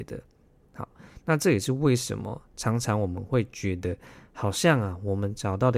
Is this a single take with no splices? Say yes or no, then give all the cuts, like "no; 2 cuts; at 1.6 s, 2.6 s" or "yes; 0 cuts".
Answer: yes; 0 cuts